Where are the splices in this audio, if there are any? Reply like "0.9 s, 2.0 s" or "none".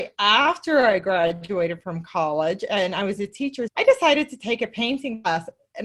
3.7 s